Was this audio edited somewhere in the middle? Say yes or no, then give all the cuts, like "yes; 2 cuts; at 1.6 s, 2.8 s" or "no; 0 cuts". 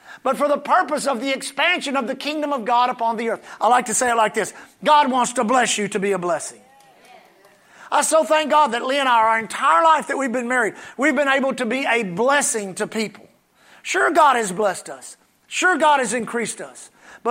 no; 0 cuts